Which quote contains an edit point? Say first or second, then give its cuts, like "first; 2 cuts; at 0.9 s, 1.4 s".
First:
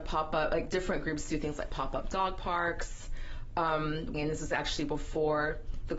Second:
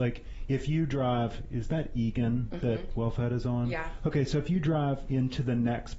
first; 1 cut; at 4.1 s